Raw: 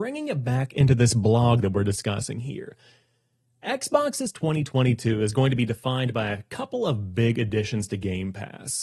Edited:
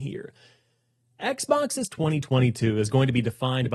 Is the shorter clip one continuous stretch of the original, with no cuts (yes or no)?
yes